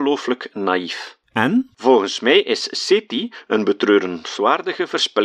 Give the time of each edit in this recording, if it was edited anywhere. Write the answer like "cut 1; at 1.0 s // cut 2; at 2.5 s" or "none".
cut 1; at 1.2 s